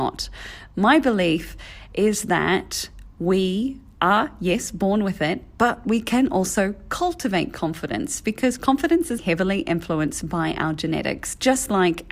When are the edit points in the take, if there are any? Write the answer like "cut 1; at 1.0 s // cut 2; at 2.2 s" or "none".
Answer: cut 1; at 9.2 s